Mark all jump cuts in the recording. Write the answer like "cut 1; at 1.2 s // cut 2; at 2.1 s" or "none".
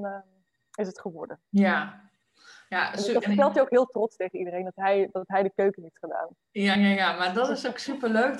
none